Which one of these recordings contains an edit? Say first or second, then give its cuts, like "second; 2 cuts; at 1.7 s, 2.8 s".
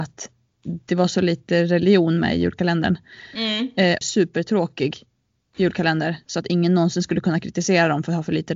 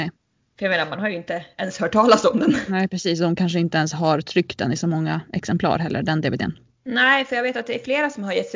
first; 1 cut; at 4.0 s